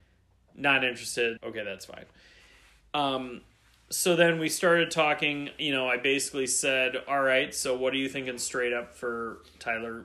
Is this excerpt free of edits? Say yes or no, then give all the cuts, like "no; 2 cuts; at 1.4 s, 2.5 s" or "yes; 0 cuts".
no; 1 cut; at 1.4 s